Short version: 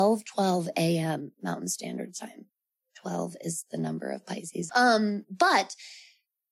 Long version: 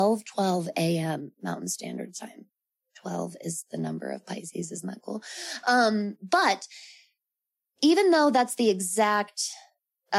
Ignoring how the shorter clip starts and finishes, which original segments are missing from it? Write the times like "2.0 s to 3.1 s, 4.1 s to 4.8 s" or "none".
4.7 s to 5.6 s